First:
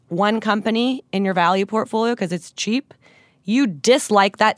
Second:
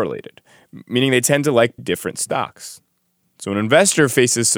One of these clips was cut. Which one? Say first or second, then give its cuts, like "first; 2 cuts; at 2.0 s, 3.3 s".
second; 1 cut; at 1.8 s